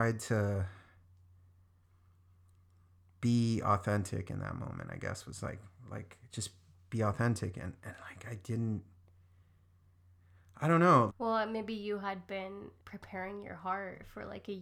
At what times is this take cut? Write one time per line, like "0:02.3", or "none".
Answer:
0:11.1
0:12.8